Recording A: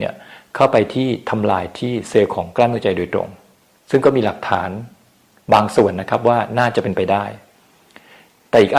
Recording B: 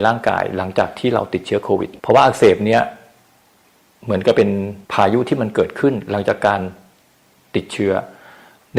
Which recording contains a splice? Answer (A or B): B